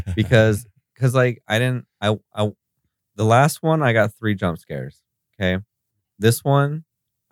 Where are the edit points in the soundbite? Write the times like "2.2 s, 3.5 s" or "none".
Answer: none